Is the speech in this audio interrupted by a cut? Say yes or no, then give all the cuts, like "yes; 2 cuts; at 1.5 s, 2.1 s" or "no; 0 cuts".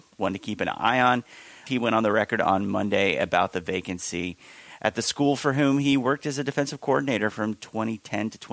yes; 1 cut; at 1.7 s